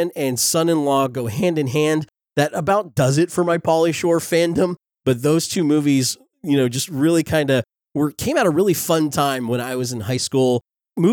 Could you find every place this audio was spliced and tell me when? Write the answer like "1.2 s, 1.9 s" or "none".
none

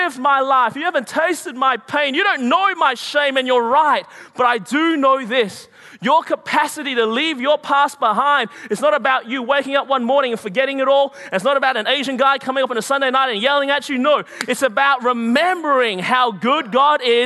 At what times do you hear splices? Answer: none

